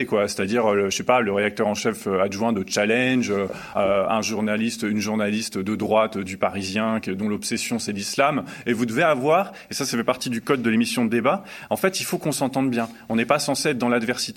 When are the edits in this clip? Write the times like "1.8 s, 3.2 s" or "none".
none